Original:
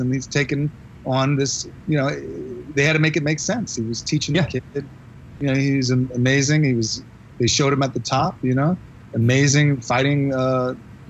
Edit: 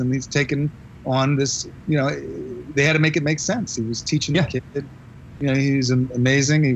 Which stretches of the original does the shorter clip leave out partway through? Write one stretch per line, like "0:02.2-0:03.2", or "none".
none